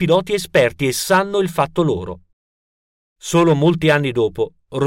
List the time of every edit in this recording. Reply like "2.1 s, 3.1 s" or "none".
none